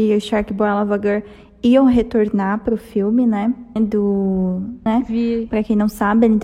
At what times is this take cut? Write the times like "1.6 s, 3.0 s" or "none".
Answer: 3.8 s, 4.9 s

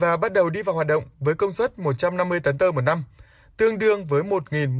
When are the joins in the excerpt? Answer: none

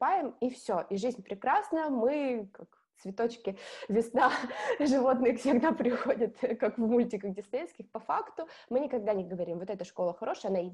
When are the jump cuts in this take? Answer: none

